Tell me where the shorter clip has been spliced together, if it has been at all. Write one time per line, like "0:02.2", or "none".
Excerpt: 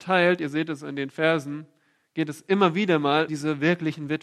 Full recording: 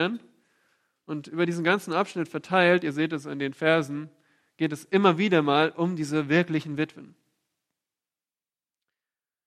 0:03.3